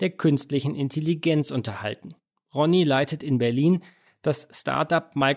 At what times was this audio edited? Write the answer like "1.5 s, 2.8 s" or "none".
none